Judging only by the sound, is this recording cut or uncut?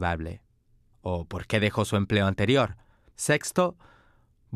cut